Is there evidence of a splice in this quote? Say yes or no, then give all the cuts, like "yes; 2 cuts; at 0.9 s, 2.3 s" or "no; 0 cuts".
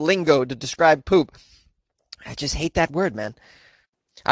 no; 0 cuts